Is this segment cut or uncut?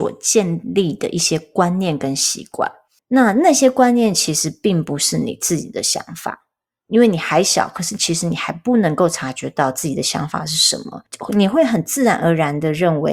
cut